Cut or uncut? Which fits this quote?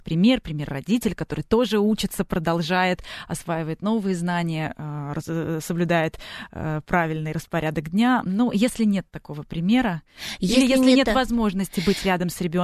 uncut